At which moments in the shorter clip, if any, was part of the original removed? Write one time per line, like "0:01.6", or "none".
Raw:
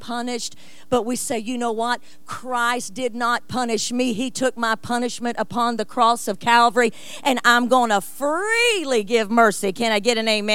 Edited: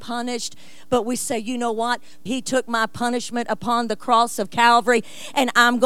0:02.3